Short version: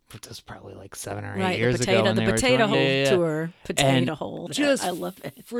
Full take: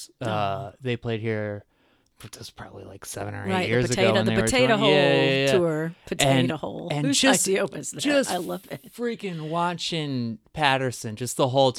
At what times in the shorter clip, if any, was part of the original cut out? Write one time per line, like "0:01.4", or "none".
0:02.7
0:04.5